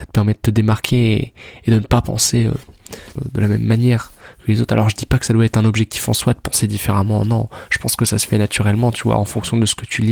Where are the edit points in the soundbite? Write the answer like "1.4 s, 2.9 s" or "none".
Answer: 3.2 s